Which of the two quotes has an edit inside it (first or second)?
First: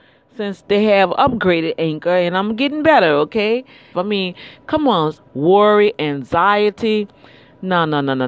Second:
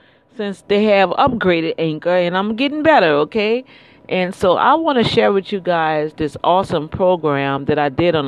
first